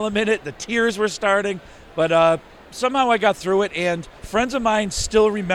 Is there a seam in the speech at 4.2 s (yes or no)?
yes